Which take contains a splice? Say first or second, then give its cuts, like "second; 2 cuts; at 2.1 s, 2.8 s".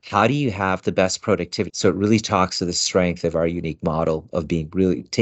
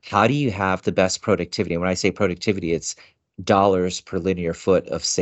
first; 1 cut; at 1.7 s